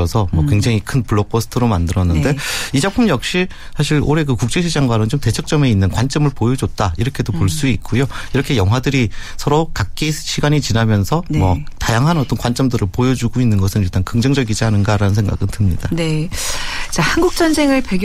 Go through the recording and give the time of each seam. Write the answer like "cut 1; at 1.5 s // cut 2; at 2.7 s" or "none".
none